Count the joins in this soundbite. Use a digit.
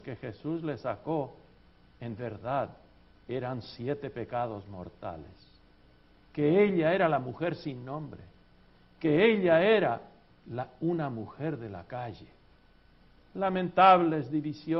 1